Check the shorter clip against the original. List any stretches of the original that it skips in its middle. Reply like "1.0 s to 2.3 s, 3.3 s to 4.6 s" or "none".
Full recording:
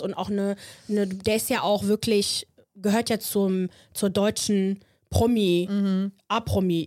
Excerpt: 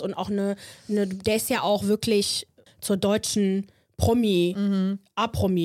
2.7 s to 3.8 s